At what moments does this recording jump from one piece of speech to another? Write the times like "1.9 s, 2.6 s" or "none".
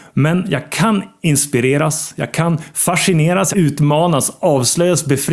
3.5 s